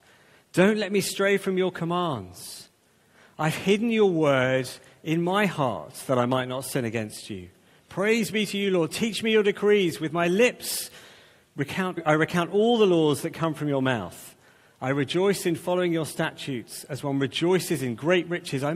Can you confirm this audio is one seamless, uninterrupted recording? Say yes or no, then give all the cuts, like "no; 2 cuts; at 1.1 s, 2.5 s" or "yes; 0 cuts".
no; 1 cut; at 12.0 s